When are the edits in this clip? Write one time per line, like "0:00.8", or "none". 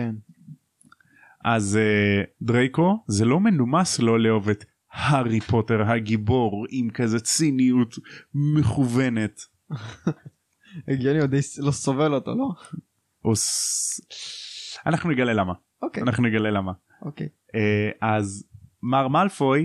0:02.3